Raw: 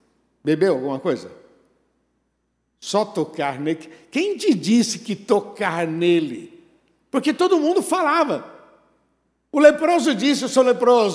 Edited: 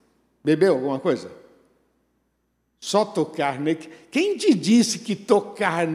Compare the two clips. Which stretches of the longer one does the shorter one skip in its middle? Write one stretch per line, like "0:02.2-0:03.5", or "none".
none